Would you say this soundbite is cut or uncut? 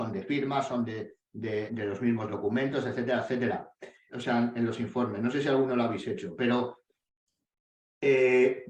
cut